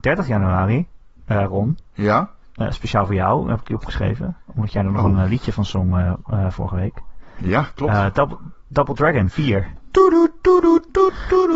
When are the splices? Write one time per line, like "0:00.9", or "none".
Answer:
none